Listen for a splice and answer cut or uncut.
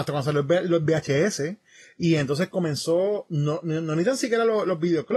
uncut